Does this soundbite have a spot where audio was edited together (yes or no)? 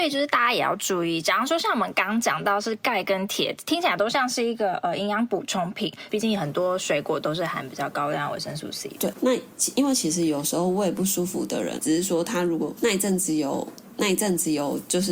yes